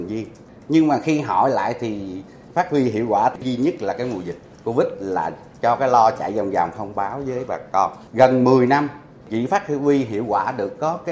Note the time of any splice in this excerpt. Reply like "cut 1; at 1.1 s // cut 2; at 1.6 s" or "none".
cut 1; at 8.1 s